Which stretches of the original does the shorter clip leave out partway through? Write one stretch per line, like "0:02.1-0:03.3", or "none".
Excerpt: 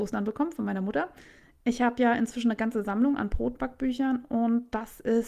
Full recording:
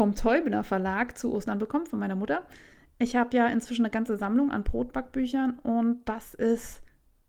none